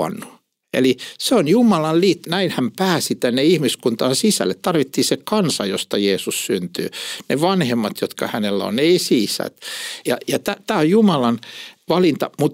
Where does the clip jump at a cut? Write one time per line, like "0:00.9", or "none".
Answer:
0:02.2
0:10.0